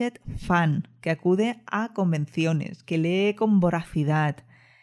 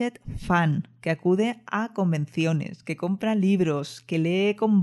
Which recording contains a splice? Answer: first; 1 cut; at 2.8 s

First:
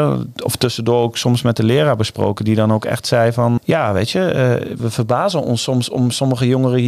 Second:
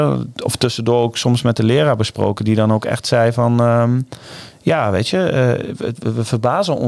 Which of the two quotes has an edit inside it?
first; 2 cuts; at 3.6 s, 4.8 s

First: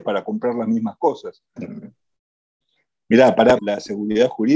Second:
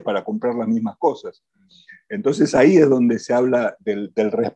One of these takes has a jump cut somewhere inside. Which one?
first; 2 cuts; at 1.6 s, 3.6 s

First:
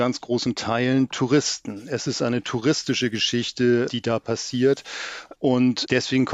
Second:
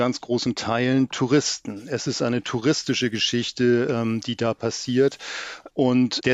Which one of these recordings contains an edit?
first; 1 cut; at 3.9 s

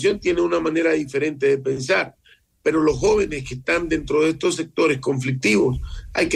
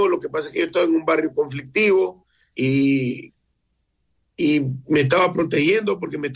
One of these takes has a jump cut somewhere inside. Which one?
second; 1 cut; at 2.5 s

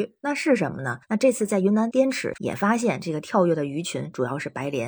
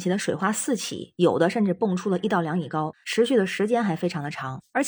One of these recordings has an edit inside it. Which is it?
first; 2 cuts; at 1.0 s, 2.3 s

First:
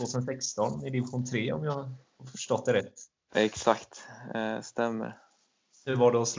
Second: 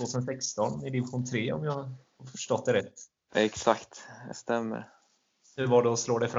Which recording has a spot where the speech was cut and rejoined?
second; 1 cut; at 4.3 s

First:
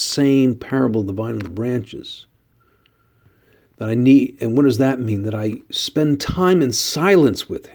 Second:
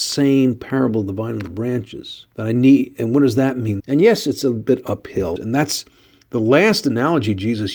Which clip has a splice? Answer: second; 3 cuts; at 2.3 s, 3.8 s, 5.4 s

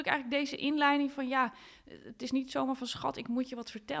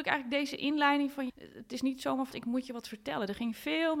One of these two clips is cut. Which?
second; 2 cuts; at 1.3 s, 2.3 s

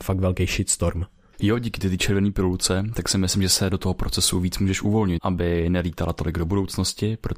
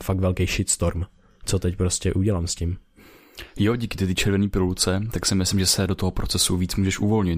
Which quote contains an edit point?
first; 2 cuts; at 1.3 s, 5.2 s

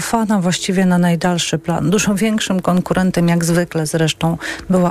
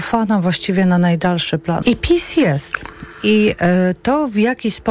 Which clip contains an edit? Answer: second; 1 cut; at 1.8 s

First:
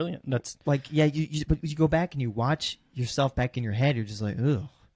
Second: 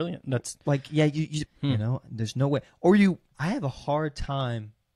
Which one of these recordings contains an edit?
second; 2 cuts; at 1.5 s, 3.3 s

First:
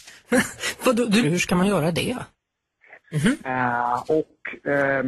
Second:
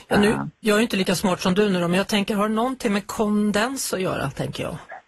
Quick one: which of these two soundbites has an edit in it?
first; 2 cuts; at 1.2 s, 3.0 s

